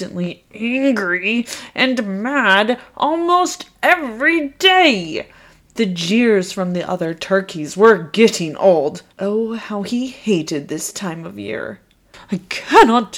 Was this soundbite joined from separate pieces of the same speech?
yes; 1 cut; at 9.1 s

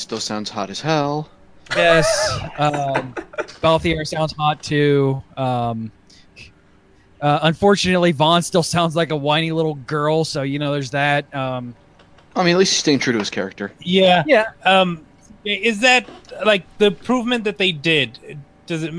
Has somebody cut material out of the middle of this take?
no; 0 cuts

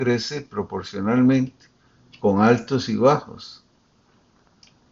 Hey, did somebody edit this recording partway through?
no; 0 cuts

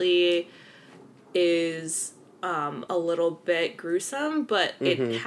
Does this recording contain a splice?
no; 0 cuts

